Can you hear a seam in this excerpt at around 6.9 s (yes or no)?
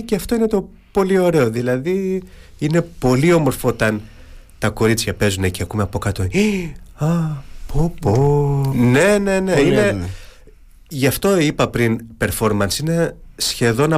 no